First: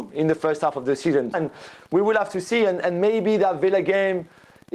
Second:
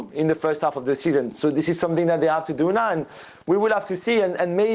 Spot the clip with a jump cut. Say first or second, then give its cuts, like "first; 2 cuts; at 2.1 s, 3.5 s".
first; 1 cut; at 1.3 s